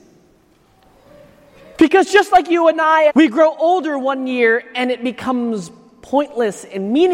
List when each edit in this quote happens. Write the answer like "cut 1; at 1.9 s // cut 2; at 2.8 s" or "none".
cut 1; at 3.1 s